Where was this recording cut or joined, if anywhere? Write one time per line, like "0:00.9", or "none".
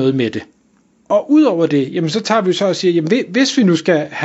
0:01.0

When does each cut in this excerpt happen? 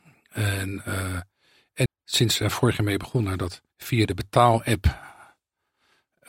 0:01.9
0:03.7

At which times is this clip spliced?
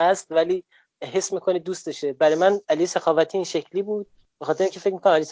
0:02.6

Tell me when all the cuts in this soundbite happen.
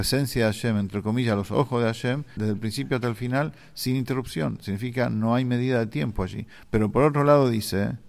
0:02.4

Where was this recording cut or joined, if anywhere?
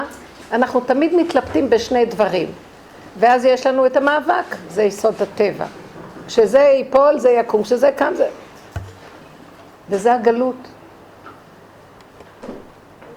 0:04.7

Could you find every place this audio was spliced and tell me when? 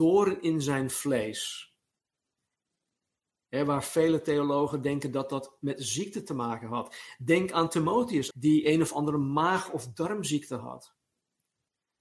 0:08.3

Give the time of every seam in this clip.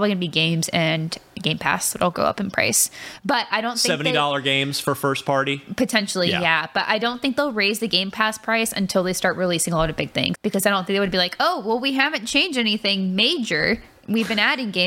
0:10.3

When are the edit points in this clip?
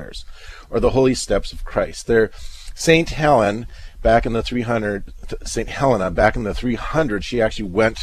none

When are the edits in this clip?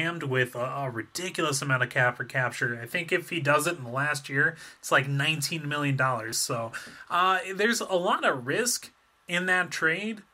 none

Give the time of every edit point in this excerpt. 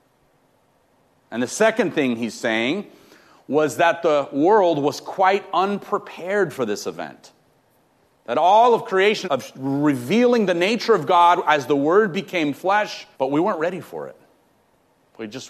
0:09.2
0:13.1

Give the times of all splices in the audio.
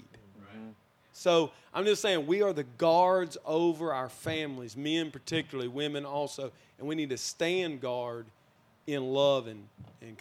none

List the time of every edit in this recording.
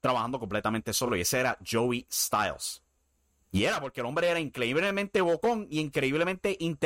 none

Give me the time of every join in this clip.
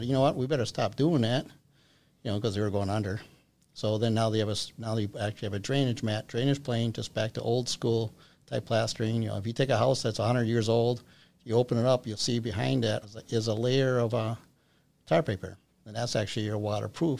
0:13.0

